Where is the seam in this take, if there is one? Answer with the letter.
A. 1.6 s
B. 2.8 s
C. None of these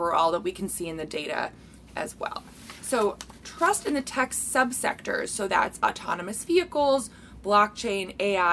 C